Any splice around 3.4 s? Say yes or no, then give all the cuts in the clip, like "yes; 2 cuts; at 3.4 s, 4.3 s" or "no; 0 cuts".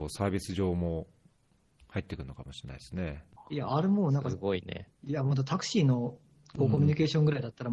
yes; 1 cut; at 3.4 s